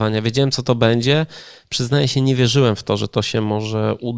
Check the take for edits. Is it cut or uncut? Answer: uncut